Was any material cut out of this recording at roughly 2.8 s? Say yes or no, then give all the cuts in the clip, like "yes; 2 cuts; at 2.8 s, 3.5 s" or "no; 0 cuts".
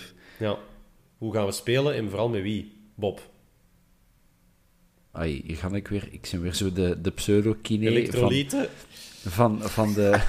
no; 2 cuts; at 1.0 s, 5.1 s